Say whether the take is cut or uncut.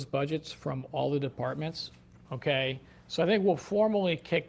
cut